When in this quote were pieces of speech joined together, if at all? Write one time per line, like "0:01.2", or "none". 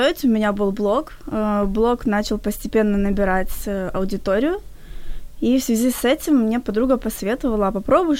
none